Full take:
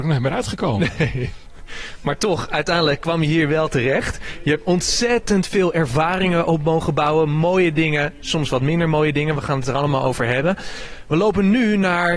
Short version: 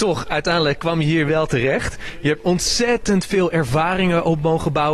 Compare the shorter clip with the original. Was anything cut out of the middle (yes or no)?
no